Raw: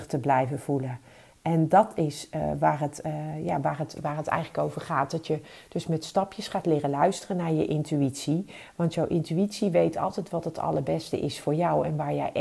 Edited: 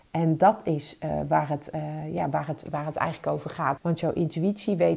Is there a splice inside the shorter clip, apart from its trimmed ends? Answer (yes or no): yes